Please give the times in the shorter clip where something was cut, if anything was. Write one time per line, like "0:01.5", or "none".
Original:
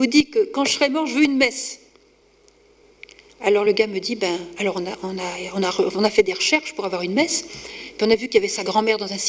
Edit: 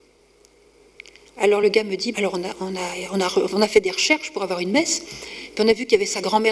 0:02.1